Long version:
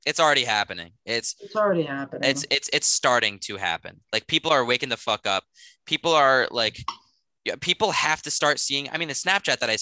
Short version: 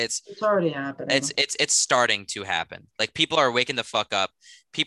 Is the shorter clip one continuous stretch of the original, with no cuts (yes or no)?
yes